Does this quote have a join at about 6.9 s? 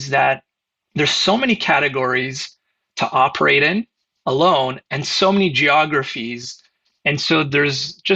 no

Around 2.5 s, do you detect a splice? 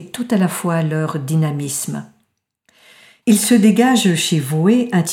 no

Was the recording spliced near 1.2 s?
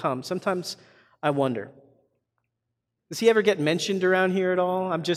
no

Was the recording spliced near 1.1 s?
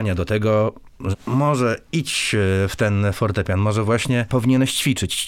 yes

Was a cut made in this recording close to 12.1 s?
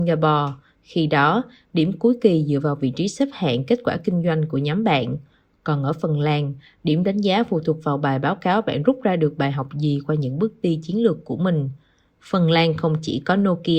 yes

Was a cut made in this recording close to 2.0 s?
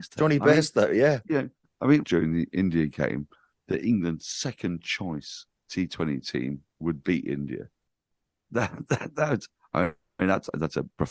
yes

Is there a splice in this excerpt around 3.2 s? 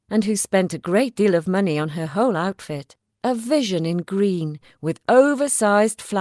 yes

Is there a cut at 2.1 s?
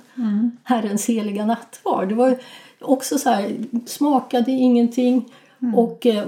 no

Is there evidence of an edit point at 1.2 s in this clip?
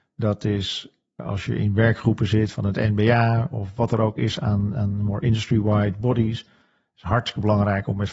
yes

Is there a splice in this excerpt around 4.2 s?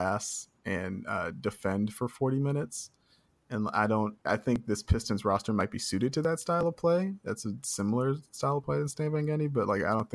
yes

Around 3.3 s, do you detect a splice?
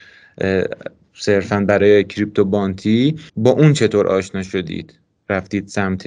yes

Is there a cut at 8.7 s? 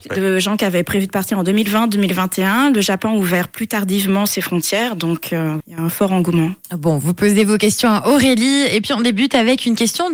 no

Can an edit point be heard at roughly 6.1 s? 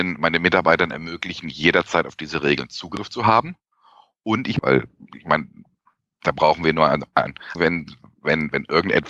no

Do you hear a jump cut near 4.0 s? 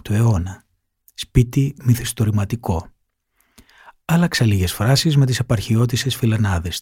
no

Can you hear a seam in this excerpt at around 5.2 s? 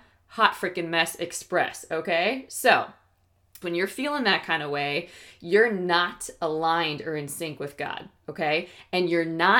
no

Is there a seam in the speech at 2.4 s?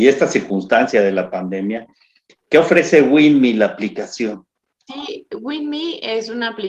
no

